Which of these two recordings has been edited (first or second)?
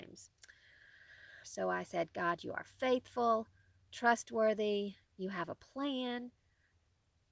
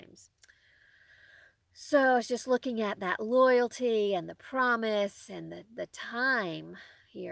first